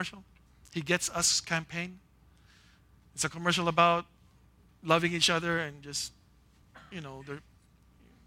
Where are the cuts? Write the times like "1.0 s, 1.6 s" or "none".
none